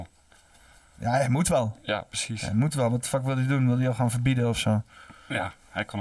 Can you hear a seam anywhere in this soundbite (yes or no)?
no